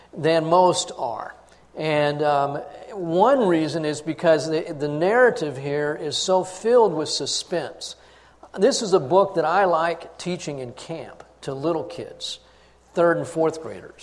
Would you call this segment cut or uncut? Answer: uncut